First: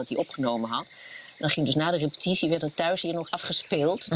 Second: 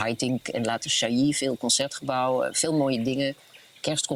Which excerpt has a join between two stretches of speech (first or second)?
first